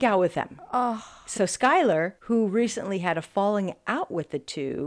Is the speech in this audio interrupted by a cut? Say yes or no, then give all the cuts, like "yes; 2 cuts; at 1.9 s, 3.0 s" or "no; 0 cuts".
no; 0 cuts